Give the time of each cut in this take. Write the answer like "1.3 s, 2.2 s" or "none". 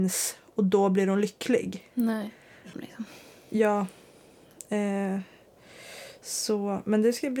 2.7 s